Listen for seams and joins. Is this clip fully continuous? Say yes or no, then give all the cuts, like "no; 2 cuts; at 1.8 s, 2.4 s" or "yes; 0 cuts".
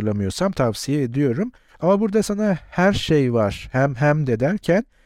yes; 0 cuts